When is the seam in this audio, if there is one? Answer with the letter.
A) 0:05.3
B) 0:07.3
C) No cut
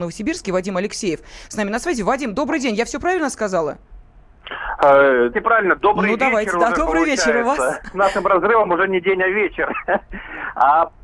A